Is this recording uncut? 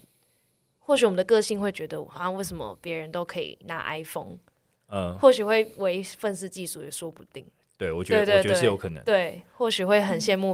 yes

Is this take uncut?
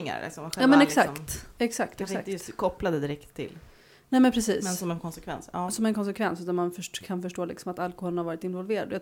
no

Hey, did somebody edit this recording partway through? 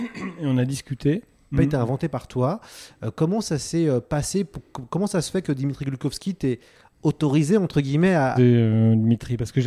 yes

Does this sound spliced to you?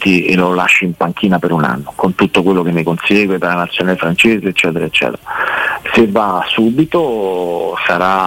no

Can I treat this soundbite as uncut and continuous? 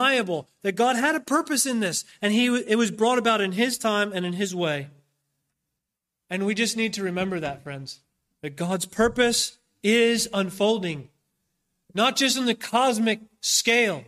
yes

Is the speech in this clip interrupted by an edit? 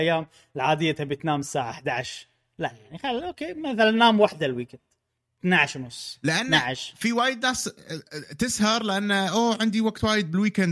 no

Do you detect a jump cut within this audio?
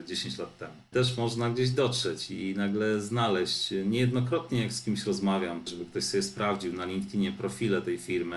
yes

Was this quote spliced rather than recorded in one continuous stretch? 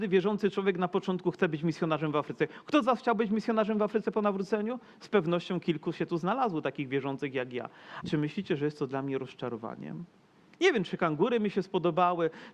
yes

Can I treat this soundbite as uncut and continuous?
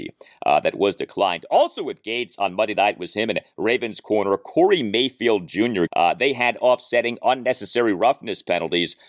no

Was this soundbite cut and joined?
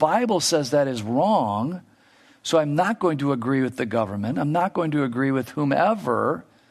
no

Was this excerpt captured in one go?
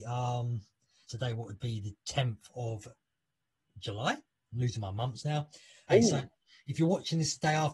no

